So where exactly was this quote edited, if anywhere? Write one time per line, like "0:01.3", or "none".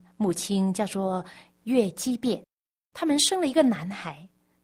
none